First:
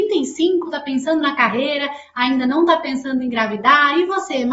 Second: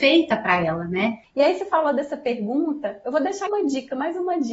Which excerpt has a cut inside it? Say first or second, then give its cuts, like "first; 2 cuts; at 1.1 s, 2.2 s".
second; 2 cuts; at 1.2 s, 3.5 s